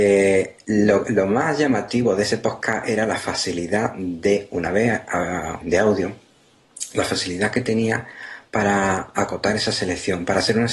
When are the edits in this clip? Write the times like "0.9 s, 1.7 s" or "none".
5.6 s